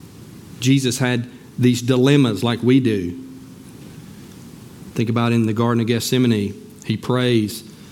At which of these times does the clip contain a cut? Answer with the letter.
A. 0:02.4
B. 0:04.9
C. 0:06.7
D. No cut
D